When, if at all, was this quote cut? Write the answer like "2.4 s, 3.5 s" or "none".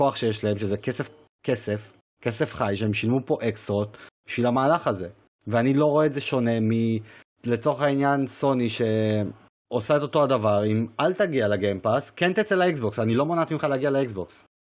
none